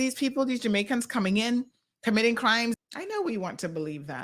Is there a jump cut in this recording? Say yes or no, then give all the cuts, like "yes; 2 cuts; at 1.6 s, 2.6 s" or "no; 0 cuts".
yes; 1 cut; at 2.7 s